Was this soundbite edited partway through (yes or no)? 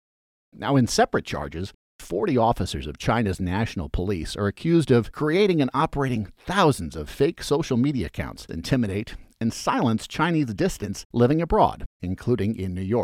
yes